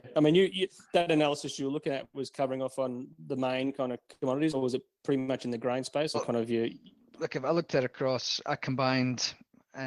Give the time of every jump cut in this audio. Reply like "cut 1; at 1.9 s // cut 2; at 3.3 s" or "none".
cut 1; at 6.1 s